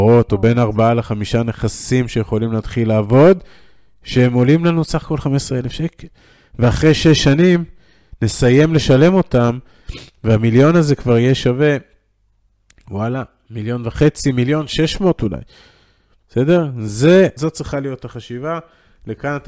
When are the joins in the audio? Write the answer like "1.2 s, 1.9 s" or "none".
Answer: 17.4 s